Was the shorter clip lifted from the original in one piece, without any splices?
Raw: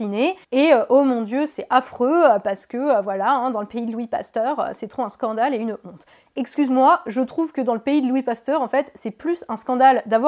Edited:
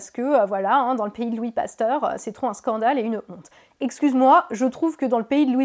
yes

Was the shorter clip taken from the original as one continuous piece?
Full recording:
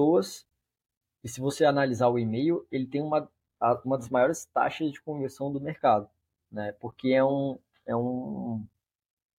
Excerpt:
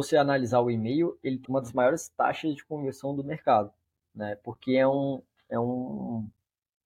no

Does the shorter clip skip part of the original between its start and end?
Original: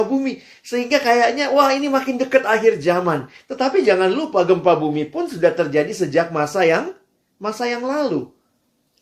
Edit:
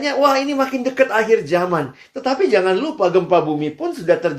no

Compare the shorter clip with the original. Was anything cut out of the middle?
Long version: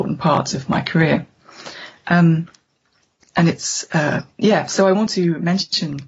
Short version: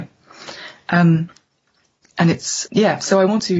yes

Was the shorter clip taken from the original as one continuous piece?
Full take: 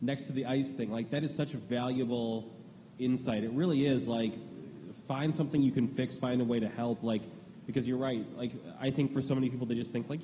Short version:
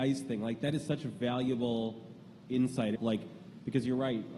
no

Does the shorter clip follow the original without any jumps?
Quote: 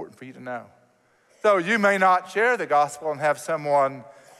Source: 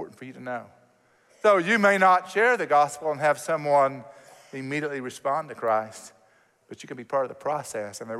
yes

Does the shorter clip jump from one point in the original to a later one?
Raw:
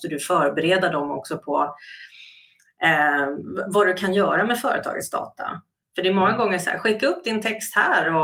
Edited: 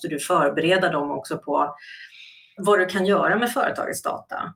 yes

